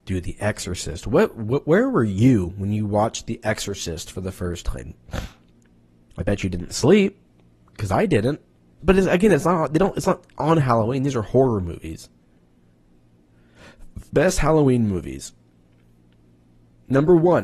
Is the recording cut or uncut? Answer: cut